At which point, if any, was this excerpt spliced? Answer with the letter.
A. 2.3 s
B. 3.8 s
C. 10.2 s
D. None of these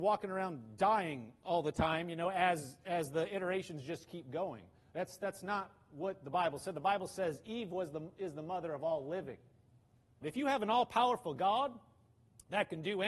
C